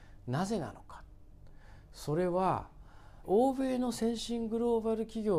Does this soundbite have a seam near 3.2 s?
yes; 1 cut; at 3.2 s

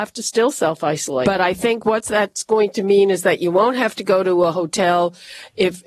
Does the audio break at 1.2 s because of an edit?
yes; 1 cut; at 1.2 s

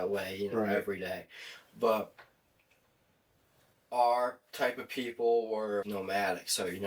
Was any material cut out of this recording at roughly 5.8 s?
yes; 1 cut; at 5.8 s

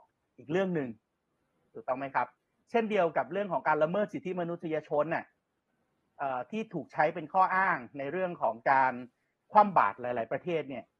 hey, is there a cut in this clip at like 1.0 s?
no; 0 cuts

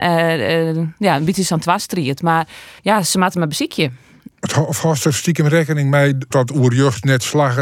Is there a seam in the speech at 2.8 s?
yes; 3 cuts; at 2.8 s, 4.3 s, 6.3 s

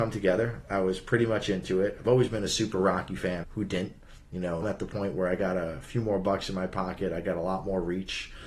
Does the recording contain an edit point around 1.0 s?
no; 2 cuts; at 3.4 s, 4.6 s

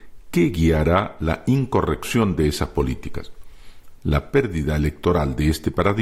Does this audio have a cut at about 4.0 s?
yes; 1 cut; at 4.0 s

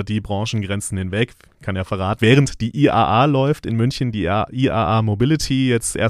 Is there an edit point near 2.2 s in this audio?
yes; 1 cut; at 2.2 s

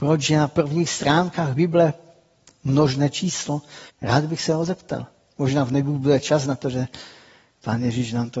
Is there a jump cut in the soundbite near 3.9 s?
yes; 1 cut; at 3.9 s

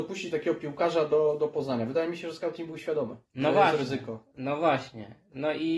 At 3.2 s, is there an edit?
yes; 2 cuts; at 3.2 s, 4.3 s

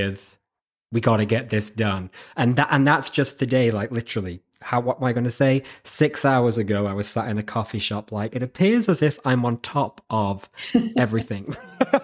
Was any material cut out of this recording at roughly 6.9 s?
no; 1 cut; at 8.3 s

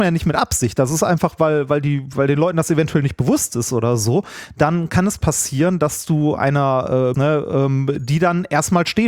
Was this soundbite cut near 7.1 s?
yes; 1 cut; at 7.1 s

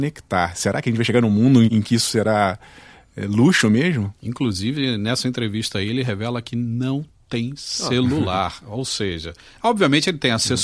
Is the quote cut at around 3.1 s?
no; 1 cut; at 1.7 s

